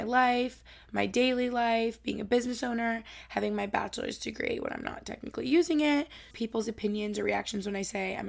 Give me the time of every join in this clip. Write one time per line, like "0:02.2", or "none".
0:06.3